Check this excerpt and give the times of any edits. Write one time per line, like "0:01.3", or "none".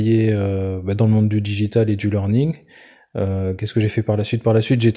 none

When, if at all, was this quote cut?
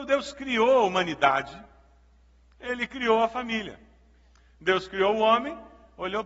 none

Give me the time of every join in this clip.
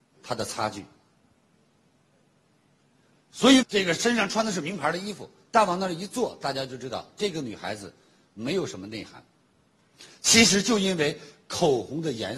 0:03.6

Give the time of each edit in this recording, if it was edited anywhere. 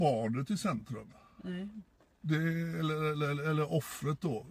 none

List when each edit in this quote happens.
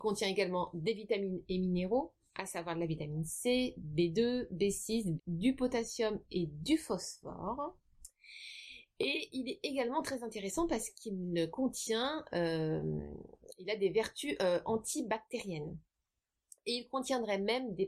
0:05.2

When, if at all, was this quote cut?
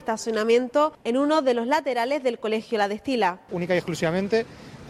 none

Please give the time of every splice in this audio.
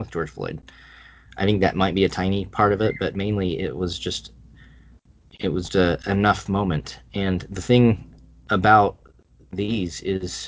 0:01.3
0:05.7

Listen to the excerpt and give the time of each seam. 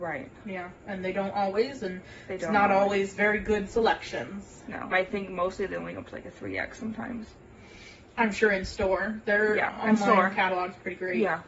0:04.9

